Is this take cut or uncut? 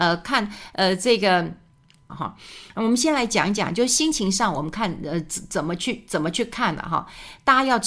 cut